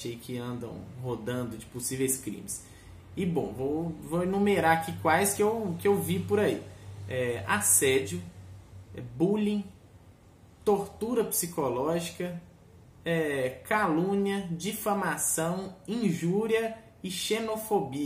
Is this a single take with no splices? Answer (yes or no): yes